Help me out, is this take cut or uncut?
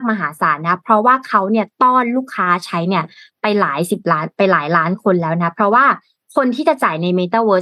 uncut